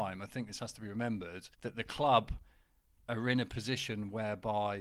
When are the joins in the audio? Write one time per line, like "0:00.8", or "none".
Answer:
0:01.5